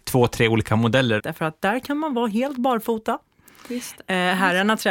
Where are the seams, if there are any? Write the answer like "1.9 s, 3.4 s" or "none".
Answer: 1.2 s